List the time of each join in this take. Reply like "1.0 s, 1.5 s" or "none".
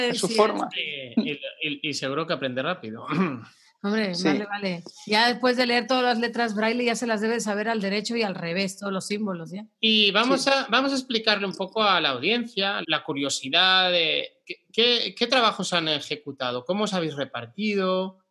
12.8 s